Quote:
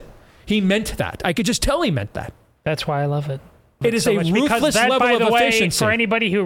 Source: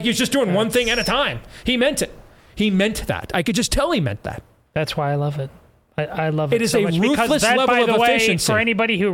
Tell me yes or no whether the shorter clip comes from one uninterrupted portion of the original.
no